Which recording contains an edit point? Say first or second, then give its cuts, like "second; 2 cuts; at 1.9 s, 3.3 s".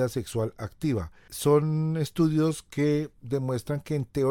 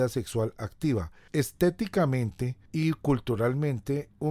second; 1 cut; at 1.3 s